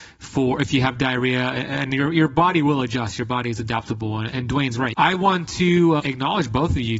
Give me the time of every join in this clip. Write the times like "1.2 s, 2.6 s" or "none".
4.9 s, 6.0 s